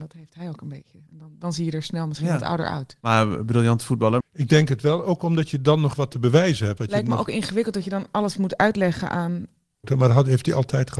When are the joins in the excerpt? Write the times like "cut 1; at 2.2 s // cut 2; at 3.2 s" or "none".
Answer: cut 1; at 4.2 s // cut 2; at 6.8 s // cut 3; at 9.8 s